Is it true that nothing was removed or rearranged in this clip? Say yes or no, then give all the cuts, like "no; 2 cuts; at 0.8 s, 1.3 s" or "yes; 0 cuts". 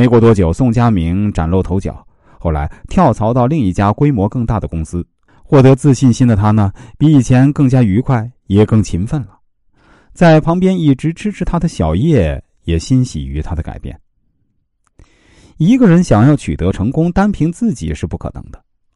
yes; 0 cuts